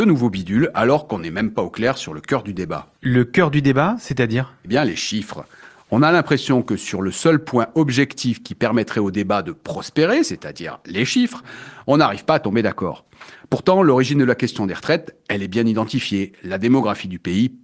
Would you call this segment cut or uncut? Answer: uncut